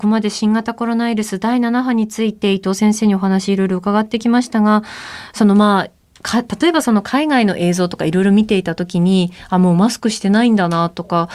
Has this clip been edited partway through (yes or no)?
no